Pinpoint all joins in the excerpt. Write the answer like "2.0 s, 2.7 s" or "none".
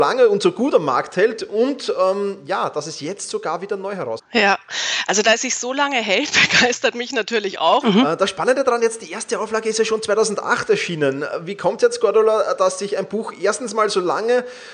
4.2 s, 7.8 s

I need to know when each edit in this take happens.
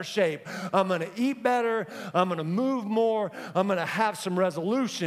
none

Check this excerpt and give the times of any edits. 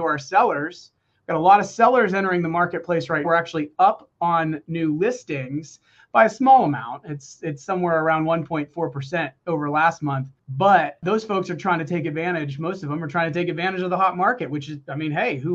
3.2 s

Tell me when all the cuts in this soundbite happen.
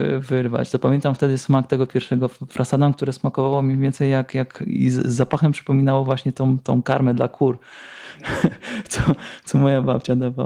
none

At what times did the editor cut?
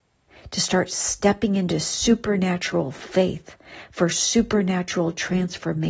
none

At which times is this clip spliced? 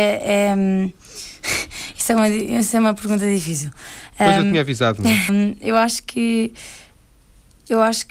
5.3 s

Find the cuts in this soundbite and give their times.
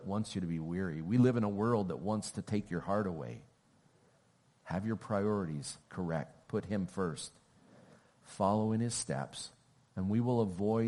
4.5 s, 5.8 s

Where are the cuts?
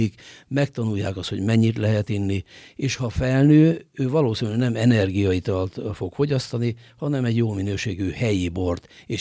none

